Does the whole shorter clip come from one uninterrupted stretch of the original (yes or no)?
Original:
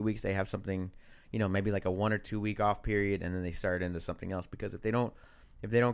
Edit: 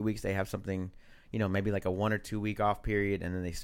yes